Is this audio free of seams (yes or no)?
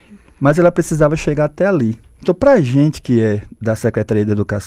no